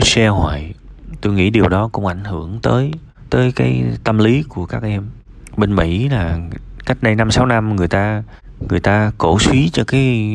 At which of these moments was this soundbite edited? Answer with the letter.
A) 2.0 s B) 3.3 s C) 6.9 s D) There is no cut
B